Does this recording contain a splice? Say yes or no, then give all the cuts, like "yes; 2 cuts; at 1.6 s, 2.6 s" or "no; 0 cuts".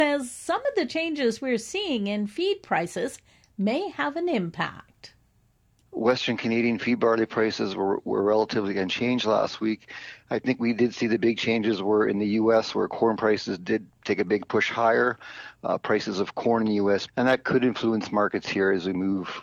yes; 1 cut; at 17.1 s